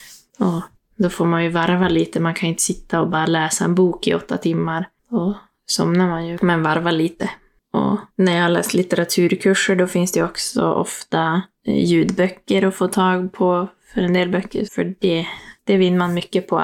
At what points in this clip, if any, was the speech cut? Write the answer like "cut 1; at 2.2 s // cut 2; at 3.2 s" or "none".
cut 1; at 6.4 s // cut 2; at 8.1 s // cut 3; at 14.7 s